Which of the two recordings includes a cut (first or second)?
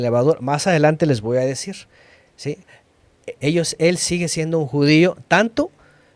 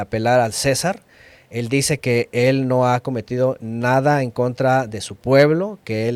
first